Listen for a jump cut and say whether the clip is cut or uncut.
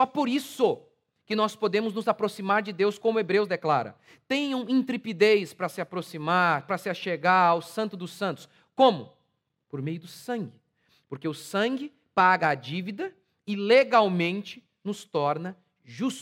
uncut